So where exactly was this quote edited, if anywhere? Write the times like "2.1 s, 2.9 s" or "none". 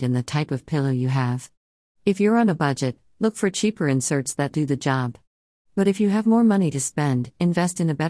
4.5 s